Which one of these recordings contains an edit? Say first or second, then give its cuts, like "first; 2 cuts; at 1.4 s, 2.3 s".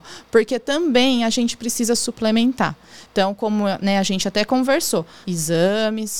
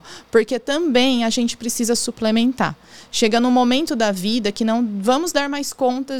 first; 2 cuts; at 3.1 s, 5.2 s